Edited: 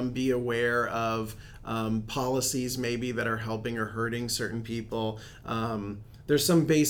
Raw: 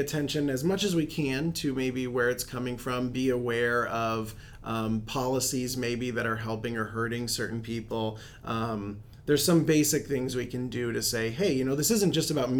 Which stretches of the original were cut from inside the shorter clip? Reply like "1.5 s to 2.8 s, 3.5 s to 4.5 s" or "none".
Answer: none